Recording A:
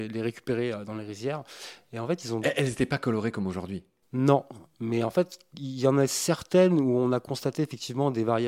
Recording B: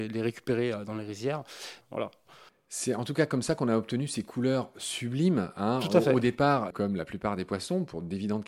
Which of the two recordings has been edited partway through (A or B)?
B